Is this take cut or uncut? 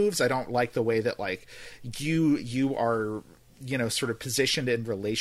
uncut